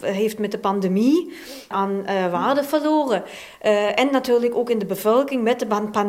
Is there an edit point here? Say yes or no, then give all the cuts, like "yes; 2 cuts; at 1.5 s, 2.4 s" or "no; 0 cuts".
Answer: yes; 1 cut; at 1.7 s